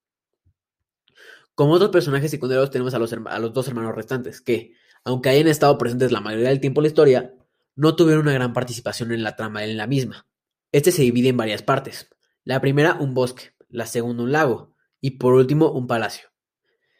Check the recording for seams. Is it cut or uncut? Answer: cut